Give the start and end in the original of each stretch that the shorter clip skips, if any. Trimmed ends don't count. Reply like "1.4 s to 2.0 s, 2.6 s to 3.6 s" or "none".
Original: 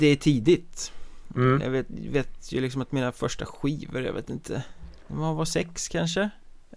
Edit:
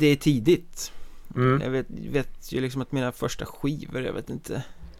none